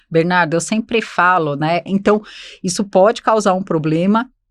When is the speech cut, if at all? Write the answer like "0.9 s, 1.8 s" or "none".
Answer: 1.9 s